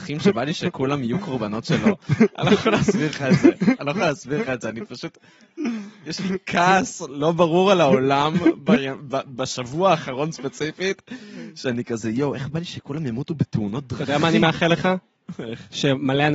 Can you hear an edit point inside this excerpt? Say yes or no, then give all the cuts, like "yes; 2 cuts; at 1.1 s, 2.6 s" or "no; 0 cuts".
no; 0 cuts